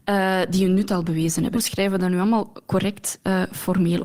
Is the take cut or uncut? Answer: cut